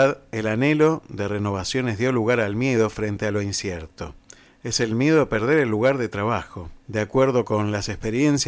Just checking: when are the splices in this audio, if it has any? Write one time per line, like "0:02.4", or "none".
0:04.5
0:06.8